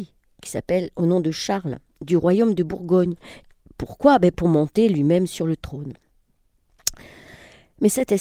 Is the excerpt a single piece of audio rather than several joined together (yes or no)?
yes